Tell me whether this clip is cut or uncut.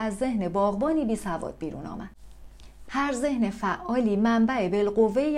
cut